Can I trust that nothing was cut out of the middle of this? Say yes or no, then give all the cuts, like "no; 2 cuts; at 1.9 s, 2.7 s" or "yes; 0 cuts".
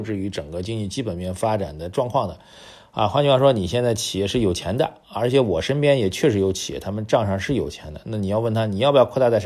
yes; 0 cuts